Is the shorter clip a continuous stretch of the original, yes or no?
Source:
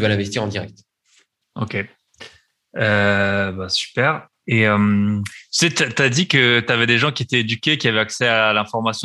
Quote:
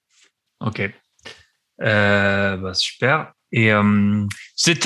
yes